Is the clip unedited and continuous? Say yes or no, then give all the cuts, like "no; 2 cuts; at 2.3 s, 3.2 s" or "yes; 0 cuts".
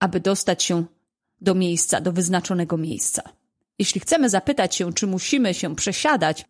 yes; 0 cuts